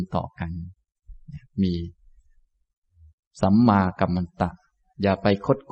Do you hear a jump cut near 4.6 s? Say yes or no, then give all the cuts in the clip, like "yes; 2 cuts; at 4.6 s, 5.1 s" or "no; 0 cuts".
no; 0 cuts